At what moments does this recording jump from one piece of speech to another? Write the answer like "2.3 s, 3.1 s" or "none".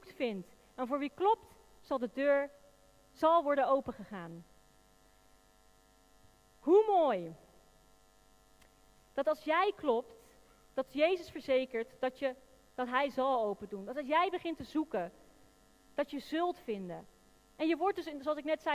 none